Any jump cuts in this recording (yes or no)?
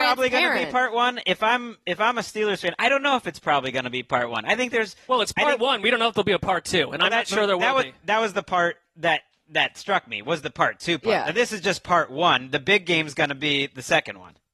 no